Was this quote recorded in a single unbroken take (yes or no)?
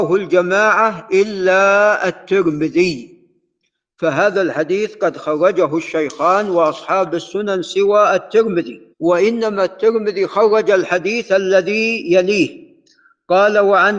no